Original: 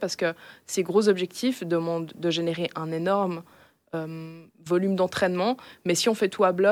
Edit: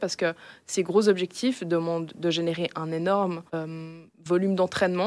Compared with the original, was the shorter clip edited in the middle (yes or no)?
yes